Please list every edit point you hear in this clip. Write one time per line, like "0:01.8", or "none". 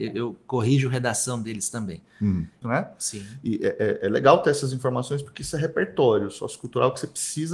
0:02.6